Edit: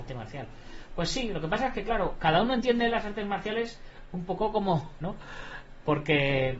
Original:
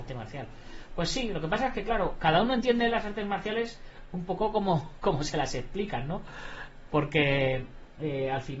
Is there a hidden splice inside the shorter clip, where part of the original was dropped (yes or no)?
yes